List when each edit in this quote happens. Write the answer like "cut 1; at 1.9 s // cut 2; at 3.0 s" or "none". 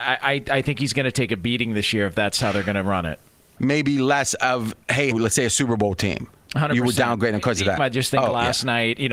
cut 1; at 3.6 s // cut 2; at 5.1 s // cut 3; at 7.8 s